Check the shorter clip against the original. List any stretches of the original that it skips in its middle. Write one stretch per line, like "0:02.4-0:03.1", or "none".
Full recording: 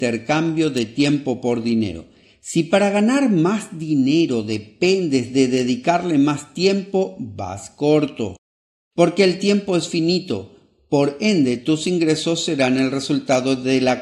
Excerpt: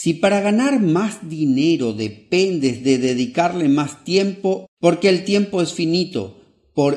0:07.1-0:08.8

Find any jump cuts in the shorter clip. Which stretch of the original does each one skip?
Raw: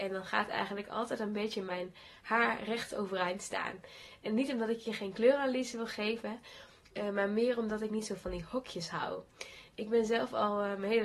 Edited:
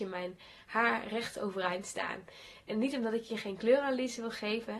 none

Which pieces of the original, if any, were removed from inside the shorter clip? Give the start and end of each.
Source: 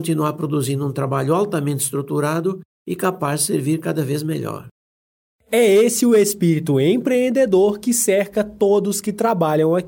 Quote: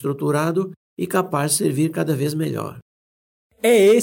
none

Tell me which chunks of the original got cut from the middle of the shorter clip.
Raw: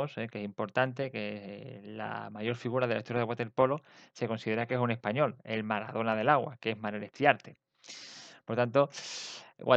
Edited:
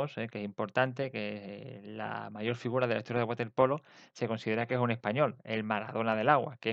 none

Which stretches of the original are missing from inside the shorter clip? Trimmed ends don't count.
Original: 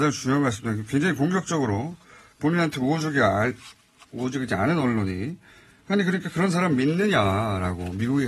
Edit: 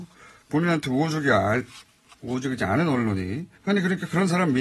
0:05.5-0:05.8

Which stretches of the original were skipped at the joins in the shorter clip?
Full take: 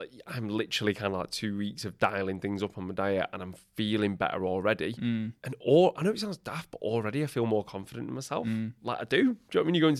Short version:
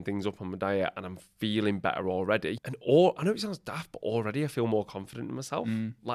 0:04.9-0:05.4

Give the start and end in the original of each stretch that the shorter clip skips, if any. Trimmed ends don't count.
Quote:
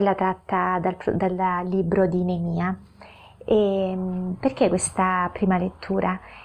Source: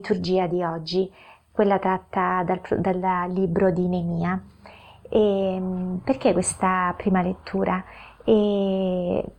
none

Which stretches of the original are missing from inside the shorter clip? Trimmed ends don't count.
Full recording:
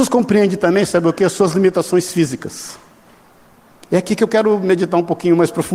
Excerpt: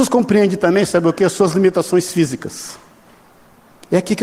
none

